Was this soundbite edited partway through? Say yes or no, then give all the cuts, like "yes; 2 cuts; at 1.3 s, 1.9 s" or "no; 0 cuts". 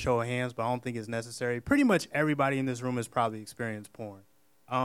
no; 0 cuts